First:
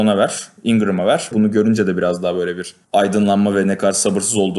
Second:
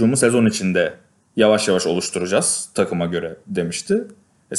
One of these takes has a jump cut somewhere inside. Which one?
first; 2 cuts; at 1.3 s, 2.8 s

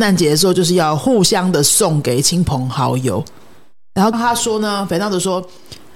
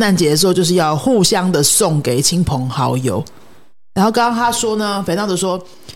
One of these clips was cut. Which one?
first; 1 cut; at 4.1 s

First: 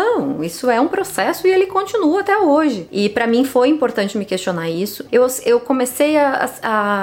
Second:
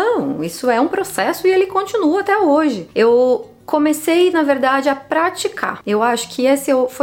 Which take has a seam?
first; 2 cuts; at 2.9 s, 5.1 s

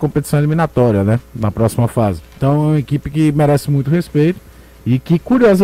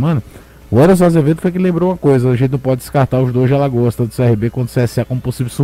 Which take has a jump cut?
first; 1 cut; at 2.3 s

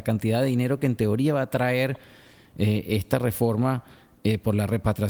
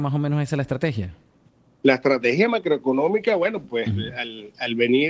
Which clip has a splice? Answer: second; 1 cut; at 3.6 s

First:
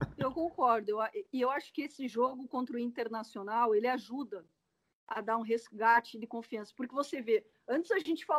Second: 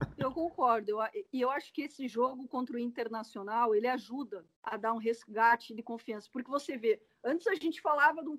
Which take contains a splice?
second; 1 cut; at 4.5 s

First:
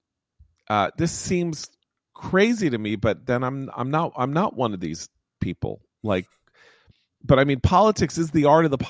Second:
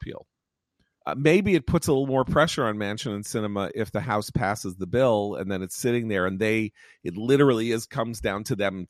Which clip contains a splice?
second; 1 cut; at 1.0 s

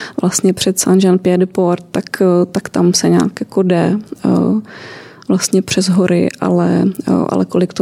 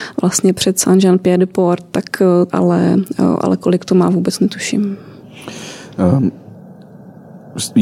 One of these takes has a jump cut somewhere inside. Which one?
second; 1 cut; at 2.5 s

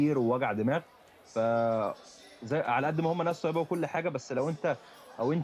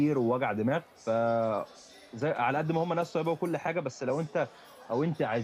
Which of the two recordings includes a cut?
second; 1 cut; at 0.9 s

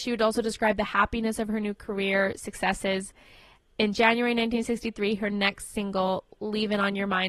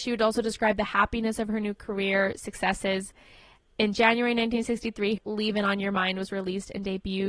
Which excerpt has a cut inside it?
second; 1 cut; at 5.2 s

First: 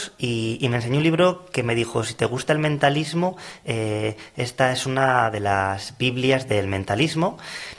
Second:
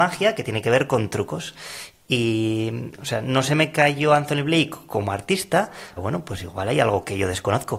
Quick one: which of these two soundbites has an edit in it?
second; 1 cut; at 6.0 s

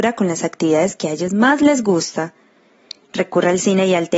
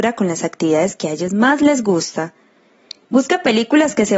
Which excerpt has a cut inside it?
second; 1 cut; at 3.0 s

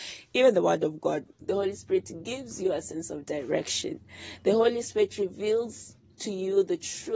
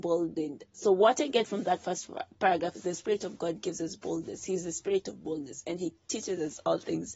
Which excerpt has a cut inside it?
first; 1 cut; at 1.4 s

